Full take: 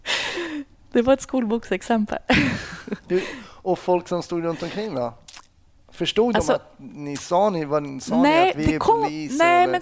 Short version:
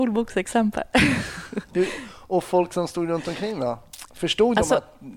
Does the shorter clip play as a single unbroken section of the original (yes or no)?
no